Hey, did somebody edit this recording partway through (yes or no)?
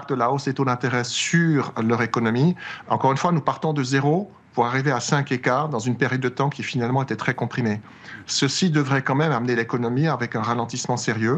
yes